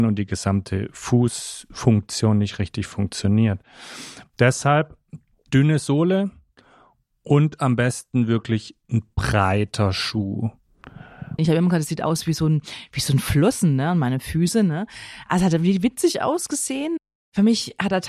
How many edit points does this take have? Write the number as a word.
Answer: one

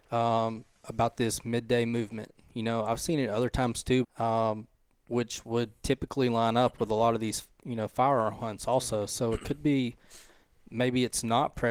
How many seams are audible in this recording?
one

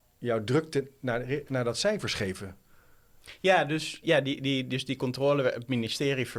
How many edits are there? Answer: one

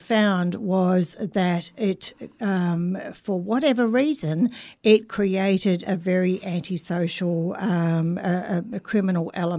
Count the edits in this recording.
zero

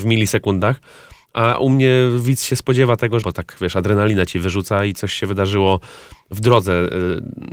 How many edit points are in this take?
two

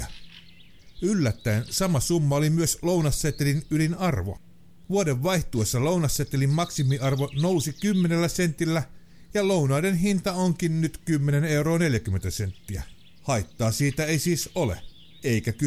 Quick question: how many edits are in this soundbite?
one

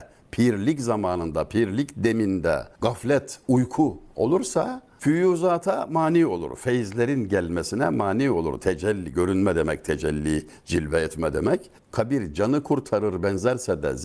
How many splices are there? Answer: one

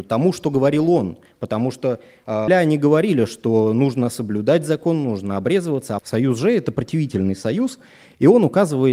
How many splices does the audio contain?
two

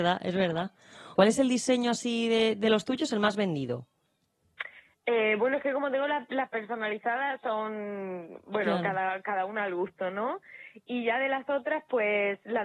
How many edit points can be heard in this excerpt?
one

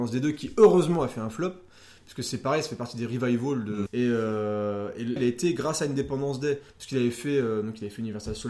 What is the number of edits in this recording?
two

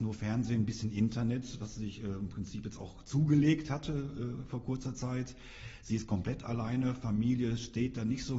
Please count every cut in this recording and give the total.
zero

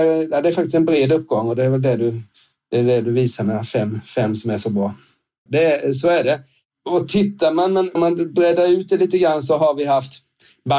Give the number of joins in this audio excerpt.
two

